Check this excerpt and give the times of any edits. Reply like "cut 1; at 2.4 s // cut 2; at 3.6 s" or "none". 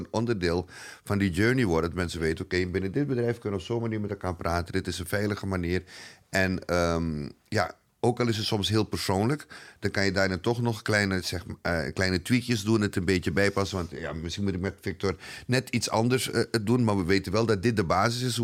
none